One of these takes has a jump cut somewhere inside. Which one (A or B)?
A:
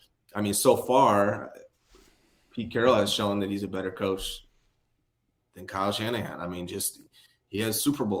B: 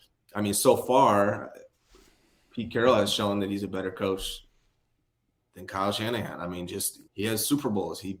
B